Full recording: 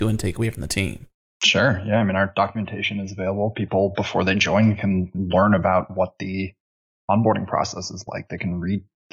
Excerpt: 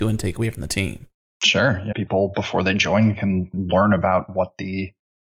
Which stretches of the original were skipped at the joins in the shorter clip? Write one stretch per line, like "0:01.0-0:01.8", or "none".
0:01.9-0:03.5